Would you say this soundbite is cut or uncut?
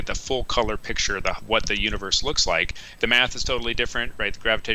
cut